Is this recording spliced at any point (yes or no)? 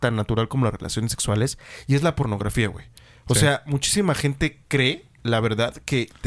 no